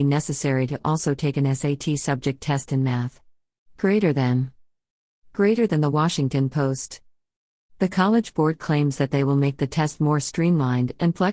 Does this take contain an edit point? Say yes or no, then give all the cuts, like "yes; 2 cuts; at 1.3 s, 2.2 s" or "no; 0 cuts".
no; 0 cuts